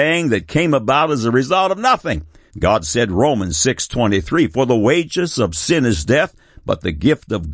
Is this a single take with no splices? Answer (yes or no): no